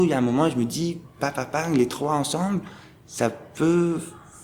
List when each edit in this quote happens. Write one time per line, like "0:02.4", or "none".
none